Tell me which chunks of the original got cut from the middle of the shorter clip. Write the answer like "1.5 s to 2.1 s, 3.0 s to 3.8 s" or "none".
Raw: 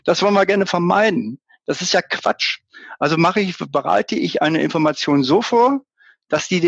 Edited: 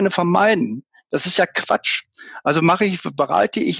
none